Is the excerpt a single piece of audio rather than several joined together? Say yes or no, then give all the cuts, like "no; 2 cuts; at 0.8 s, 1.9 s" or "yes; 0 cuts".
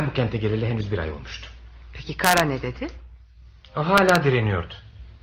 yes; 0 cuts